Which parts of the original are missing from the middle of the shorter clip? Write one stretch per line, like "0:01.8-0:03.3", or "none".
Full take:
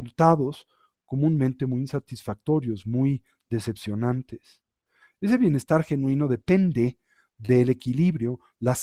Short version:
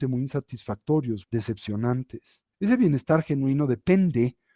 0:02.8-0:03.4
0:04.7-0:05.1